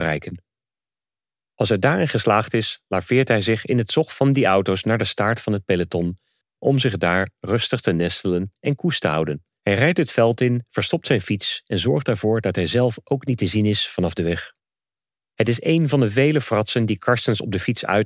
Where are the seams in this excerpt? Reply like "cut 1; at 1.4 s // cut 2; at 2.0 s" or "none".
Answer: cut 1; at 9.6 s // cut 2; at 15.2 s

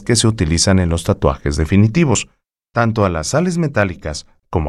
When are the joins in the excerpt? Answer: cut 1; at 2.7 s

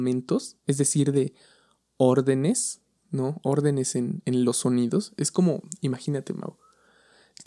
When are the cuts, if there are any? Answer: none

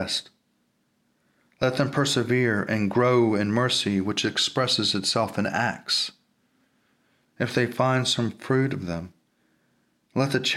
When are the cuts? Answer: cut 1; at 7.2 s

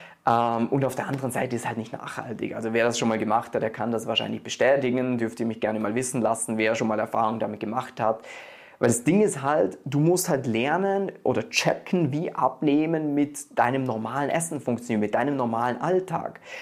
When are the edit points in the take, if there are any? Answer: none

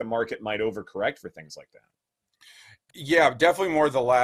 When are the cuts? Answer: cut 1; at 2.9 s

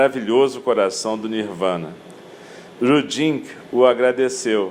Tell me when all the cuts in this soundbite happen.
cut 1; at 2.8 s

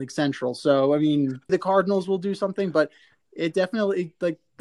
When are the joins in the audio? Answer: cut 1; at 1.5 s

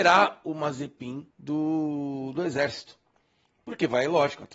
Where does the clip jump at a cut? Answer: cut 1; at 1.3 s

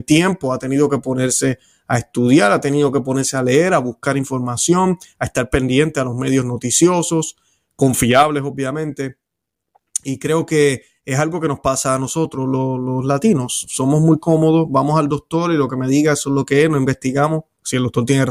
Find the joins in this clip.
none

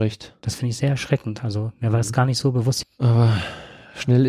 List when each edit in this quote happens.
cut 1; at 2.8 s

